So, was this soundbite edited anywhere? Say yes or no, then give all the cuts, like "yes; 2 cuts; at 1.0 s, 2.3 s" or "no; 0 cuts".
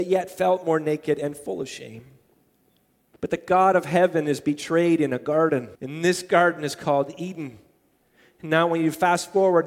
yes; 2 cuts; at 3.1 s, 5.8 s